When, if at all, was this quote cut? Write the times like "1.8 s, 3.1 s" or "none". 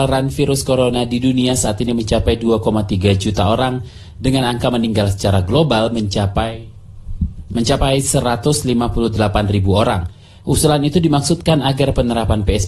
10.4 s